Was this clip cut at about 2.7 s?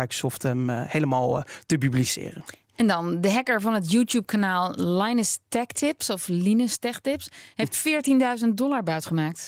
no; 0 cuts

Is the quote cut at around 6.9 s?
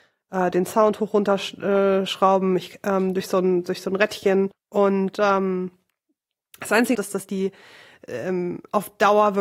yes; 2 cuts; at 4.5 s, 6.9 s

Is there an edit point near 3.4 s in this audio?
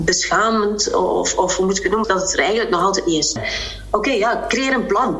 yes; 2 cuts; at 2.0 s, 3.4 s

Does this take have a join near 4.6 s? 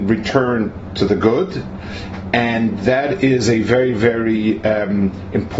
no; 0 cuts

